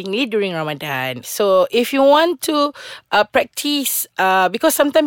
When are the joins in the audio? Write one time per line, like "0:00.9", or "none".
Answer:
0:01.2